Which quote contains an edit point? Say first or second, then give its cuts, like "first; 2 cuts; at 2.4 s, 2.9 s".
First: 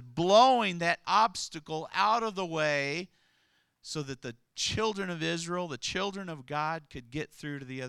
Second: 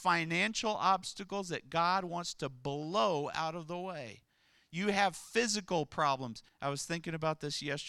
second; 1 cut; at 6.5 s